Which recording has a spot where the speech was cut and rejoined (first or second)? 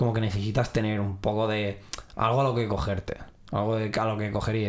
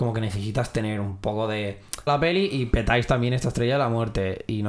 second